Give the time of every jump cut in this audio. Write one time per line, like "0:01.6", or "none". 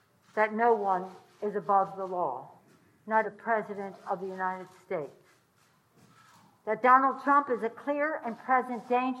0:03.2